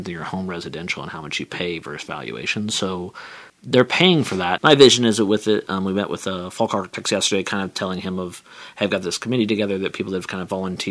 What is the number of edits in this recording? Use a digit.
2